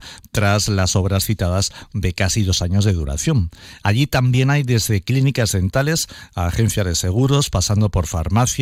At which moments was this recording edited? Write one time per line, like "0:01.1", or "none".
none